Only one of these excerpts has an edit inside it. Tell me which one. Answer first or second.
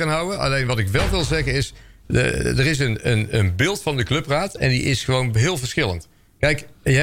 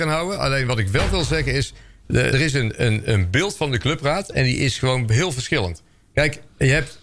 second